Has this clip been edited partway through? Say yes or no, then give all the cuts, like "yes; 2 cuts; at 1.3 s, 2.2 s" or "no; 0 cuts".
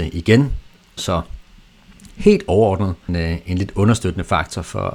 yes; 2 cuts; at 1.0 s, 3.1 s